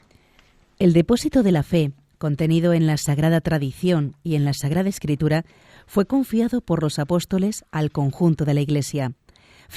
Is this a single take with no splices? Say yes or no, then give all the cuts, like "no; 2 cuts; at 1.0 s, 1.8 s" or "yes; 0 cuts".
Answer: yes; 0 cuts